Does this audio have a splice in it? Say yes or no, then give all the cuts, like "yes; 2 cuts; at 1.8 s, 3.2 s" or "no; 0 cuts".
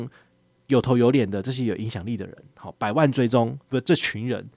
no; 0 cuts